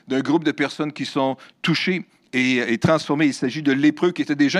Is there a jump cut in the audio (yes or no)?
no